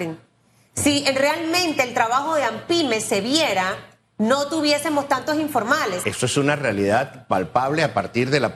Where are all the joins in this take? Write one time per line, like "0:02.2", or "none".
0:06.0